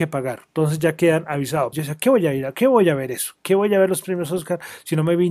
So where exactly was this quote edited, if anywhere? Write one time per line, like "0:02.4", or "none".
0:01.7